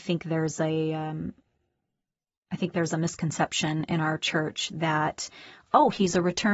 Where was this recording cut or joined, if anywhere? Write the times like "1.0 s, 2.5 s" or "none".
none